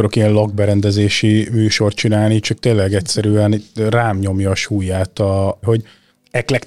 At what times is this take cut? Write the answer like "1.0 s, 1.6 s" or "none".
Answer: 5.6 s